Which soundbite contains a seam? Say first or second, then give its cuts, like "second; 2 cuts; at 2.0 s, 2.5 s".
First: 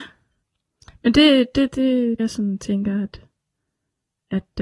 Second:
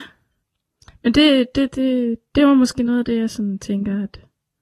first; 1 cut; at 2.2 s